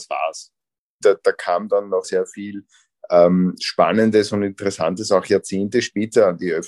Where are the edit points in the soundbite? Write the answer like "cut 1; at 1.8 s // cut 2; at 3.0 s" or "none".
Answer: cut 1; at 1.0 s // cut 2; at 2.0 s